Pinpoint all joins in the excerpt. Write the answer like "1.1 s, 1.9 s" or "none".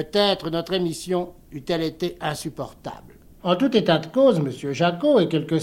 3.4 s